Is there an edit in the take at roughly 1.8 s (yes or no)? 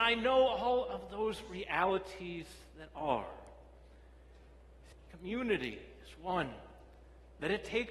no